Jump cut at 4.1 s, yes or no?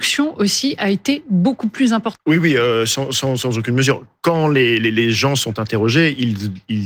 no